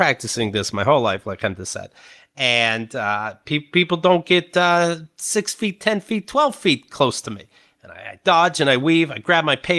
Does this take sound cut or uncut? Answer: uncut